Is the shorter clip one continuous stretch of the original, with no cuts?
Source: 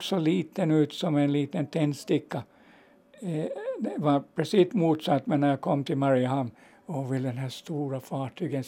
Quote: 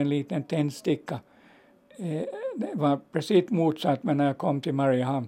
yes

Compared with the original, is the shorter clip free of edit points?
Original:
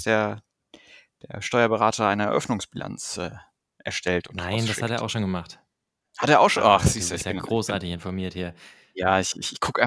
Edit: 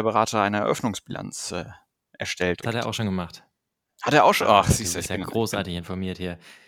no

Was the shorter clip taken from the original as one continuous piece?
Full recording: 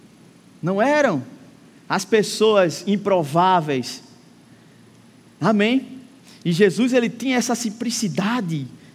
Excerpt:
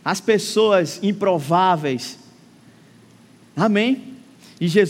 yes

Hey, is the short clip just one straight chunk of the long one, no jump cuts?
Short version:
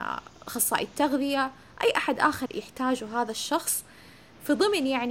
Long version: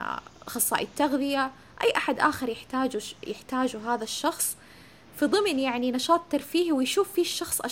no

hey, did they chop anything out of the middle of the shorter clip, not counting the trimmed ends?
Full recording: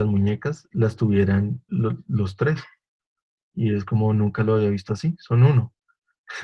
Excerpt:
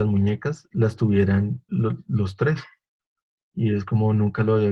no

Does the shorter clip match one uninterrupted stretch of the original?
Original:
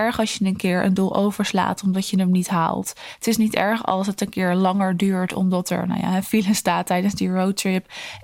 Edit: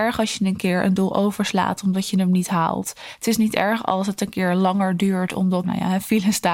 no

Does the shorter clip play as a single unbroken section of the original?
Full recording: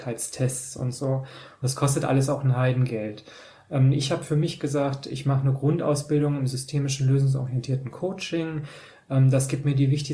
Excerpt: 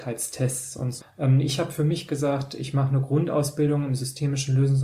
no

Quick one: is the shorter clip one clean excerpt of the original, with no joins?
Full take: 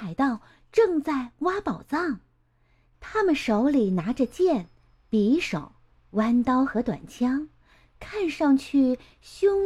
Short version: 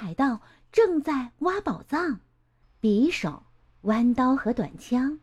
no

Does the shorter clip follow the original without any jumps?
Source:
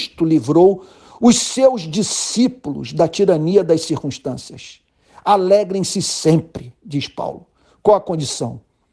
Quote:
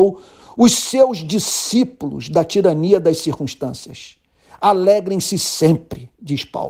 yes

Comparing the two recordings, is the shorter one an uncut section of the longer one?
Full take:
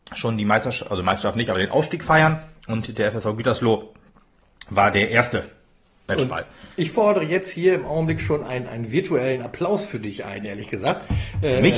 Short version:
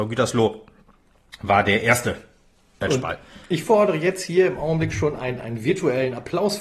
yes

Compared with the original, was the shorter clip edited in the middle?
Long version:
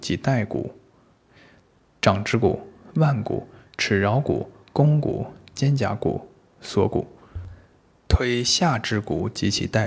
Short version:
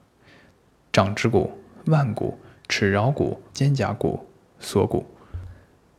yes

